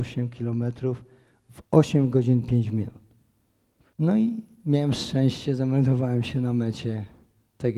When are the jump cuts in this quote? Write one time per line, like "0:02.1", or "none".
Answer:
0:03.9